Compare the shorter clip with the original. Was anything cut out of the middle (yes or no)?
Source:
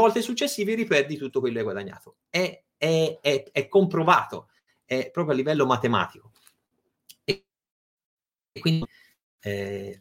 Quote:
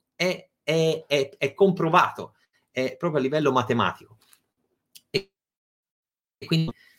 no